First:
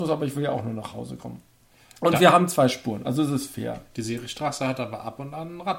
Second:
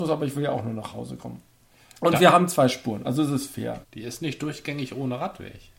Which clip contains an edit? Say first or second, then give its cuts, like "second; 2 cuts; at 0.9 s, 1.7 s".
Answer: second; 1 cut; at 3.8 s